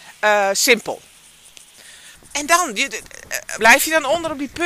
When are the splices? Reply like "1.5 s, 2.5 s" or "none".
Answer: 2.2 s, 3.6 s